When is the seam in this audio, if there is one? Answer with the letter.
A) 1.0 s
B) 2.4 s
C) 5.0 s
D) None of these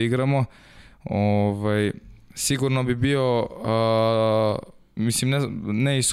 C